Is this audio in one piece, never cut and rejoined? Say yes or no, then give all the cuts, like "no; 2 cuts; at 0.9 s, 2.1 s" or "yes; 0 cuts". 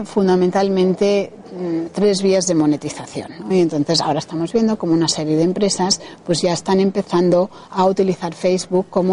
no; 1 cut; at 3.5 s